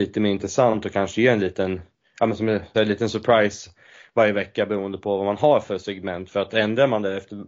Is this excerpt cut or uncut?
cut